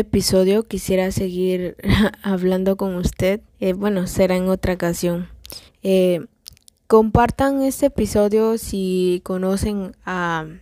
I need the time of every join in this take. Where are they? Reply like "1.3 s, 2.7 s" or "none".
3.5 s, 5.7 s